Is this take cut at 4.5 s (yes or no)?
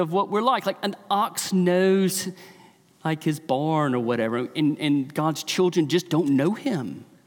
no